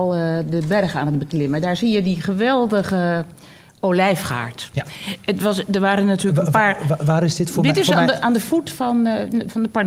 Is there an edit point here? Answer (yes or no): no